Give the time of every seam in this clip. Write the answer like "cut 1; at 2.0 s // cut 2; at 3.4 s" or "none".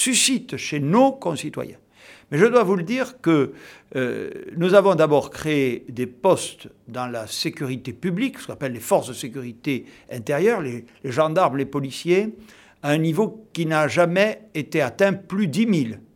none